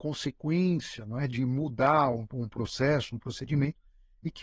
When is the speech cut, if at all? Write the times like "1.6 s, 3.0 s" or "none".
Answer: none